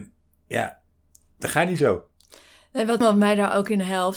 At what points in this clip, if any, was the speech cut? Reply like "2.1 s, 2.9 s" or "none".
3.0 s